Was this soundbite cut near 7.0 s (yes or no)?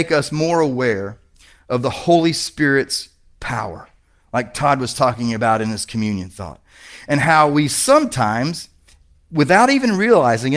no